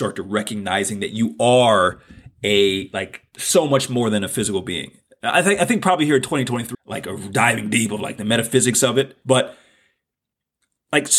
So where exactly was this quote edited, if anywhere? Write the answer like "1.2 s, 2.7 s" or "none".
6.7 s, 9.2 s